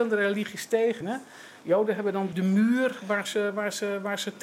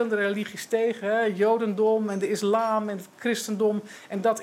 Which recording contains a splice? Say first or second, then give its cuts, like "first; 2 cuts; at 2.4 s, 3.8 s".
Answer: first; 2 cuts; at 1.0 s, 2.3 s